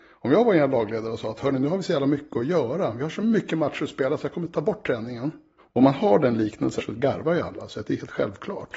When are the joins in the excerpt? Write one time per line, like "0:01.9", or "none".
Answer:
0:05.6
0:06.8